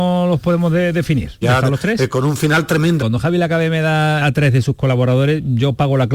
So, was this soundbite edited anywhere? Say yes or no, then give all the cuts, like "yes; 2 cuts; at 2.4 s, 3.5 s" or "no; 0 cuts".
yes; 3 cuts; at 1.4 s, 3.0 s, 4.2 s